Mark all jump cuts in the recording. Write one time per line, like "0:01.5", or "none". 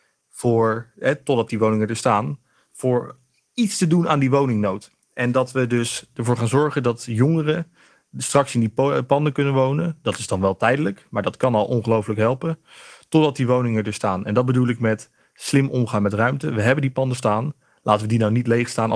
none